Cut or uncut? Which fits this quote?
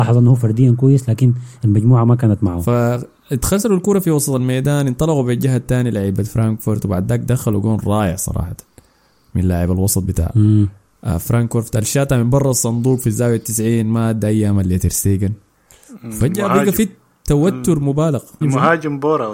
cut